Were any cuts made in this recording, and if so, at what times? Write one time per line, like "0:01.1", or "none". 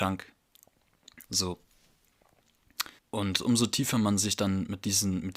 0:01.2
0:03.0